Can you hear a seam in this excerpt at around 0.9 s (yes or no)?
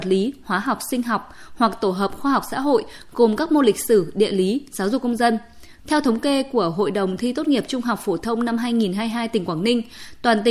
no